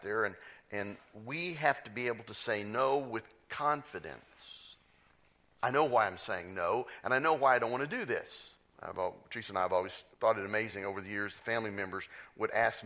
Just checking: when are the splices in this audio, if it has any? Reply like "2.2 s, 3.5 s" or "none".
8.7 s, 10.1 s